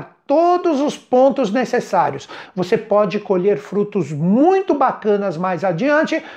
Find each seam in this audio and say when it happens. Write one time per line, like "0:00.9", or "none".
0:02.5